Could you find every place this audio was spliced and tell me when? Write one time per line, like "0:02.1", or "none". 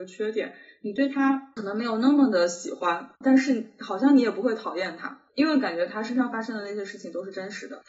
0:03.2